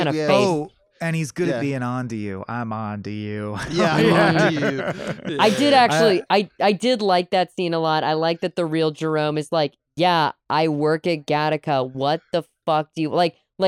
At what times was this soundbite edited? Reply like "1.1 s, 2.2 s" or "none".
none